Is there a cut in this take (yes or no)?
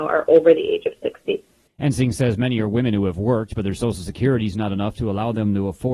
no